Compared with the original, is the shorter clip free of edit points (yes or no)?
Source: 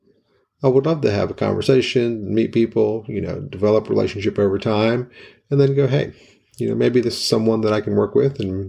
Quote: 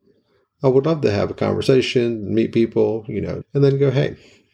no